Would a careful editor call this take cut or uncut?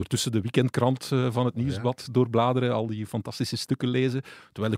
uncut